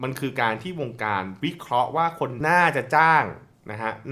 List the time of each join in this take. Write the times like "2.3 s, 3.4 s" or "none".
2.4 s